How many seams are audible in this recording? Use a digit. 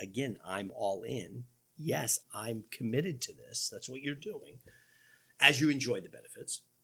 1